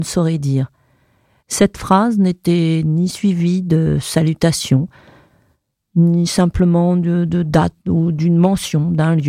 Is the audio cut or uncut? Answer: cut